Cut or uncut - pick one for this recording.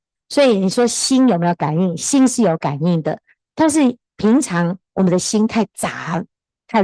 uncut